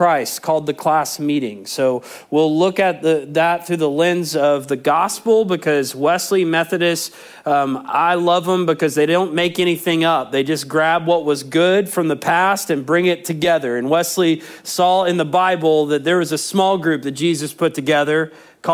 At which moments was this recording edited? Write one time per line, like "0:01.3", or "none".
none